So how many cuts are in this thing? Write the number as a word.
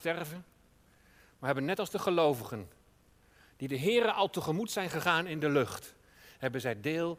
zero